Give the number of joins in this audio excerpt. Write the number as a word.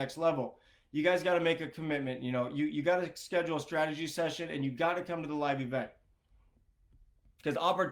zero